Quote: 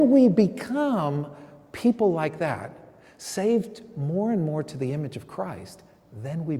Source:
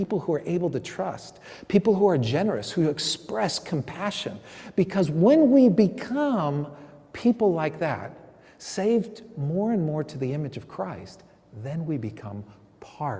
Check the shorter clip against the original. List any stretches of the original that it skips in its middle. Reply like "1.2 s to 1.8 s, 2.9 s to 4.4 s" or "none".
none